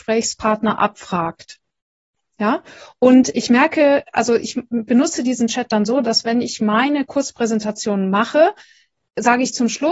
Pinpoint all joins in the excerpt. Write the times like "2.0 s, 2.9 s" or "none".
none